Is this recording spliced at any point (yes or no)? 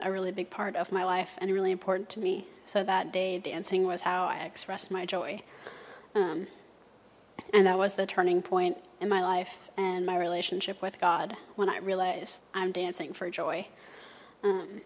yes